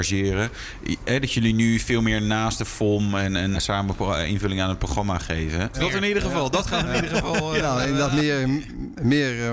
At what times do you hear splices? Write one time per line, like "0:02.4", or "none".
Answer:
0:03.5
0:05.7